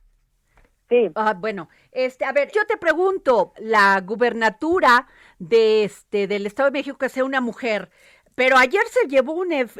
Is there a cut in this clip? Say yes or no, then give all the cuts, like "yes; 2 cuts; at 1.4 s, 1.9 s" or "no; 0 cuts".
yes; 2 cuts; at 2.5 s, 3.5 s